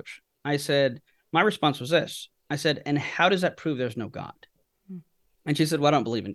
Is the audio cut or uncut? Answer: cut